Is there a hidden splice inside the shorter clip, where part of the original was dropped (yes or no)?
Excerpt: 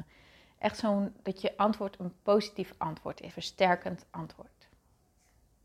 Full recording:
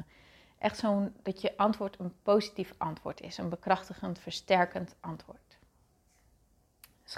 yes